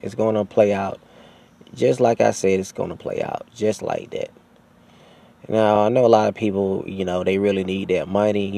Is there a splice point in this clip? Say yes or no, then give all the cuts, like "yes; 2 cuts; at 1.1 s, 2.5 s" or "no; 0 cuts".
no; 0 cuts